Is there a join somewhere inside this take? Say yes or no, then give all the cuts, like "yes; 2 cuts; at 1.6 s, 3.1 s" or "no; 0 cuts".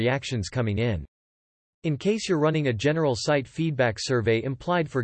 no; 0 cuts